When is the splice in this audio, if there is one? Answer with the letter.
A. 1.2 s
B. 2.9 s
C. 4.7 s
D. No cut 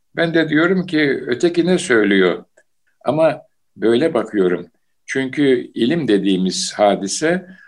B